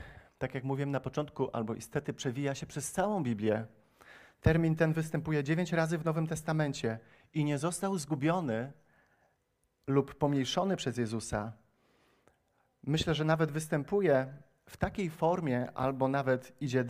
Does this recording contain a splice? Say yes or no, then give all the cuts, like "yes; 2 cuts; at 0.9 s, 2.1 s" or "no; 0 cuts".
no; 0 cuts